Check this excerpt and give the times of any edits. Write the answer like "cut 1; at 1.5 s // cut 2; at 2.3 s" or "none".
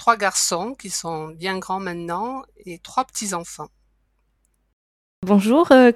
none

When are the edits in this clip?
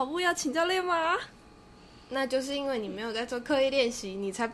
none

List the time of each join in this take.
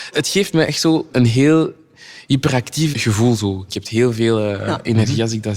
cut 1; at 2.9 s

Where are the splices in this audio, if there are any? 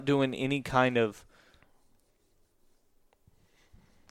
none

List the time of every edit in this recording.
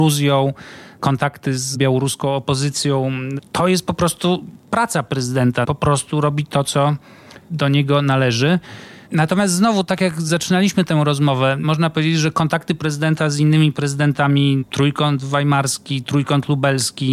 cut 1; at 5.6 s // cut 2; at 9.1 s

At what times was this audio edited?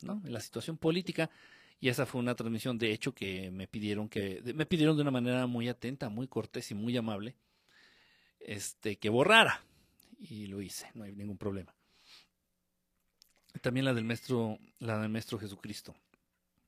none

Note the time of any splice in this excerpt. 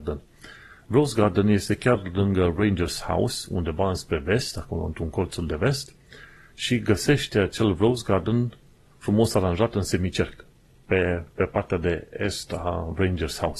none

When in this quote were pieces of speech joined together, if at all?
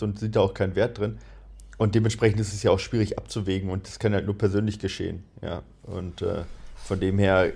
none

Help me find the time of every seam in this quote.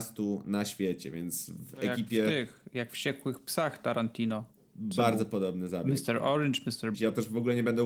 cut 1; at 6.9 s

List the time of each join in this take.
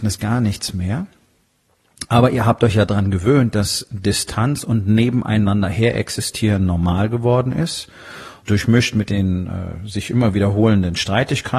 cut 1; at 8.4 s

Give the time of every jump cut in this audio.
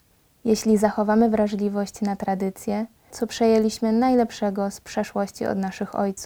cut 1; at 3.1 s

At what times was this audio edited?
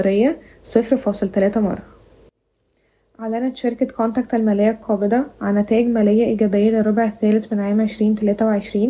none

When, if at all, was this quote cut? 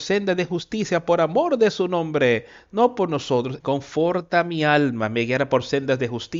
cut 1; at 3.6 s

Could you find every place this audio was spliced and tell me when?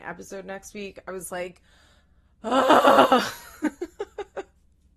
none

